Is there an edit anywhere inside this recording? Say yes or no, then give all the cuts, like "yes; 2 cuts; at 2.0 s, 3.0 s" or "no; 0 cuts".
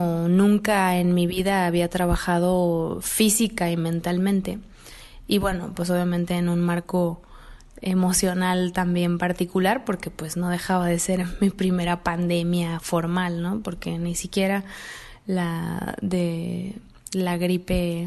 no; 0 cuts